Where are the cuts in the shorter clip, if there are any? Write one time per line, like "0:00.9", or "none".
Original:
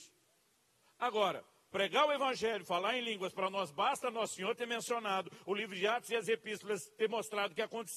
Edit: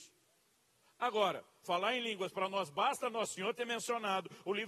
0:01.6